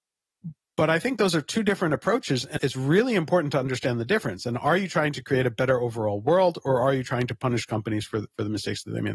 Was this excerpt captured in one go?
no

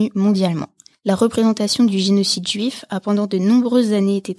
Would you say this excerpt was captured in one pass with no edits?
no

